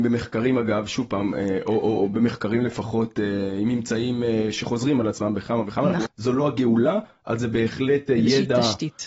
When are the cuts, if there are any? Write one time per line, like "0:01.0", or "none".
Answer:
0:06.0